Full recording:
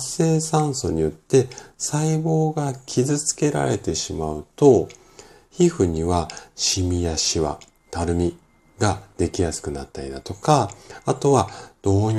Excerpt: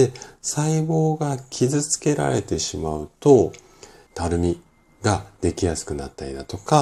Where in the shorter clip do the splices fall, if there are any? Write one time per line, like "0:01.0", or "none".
0:04.1